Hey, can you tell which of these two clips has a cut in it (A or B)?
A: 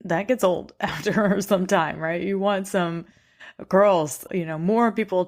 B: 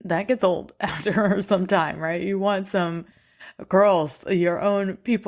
A